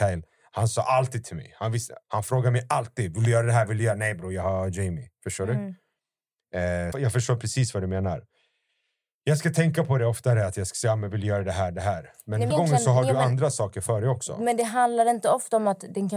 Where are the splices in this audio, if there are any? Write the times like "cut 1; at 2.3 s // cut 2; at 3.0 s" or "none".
cut 1; at 2.0 s // cut 2; at 6.9 s // cut 3; at 12.5 s